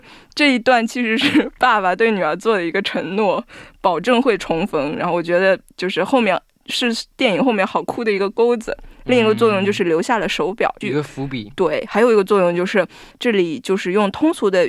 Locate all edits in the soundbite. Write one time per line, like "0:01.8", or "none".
0:10.8
0:13.1

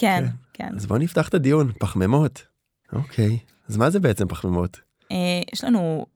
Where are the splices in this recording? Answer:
0:02.8
0:05.1

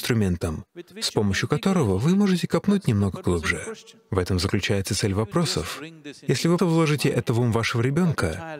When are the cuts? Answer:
0:06.6

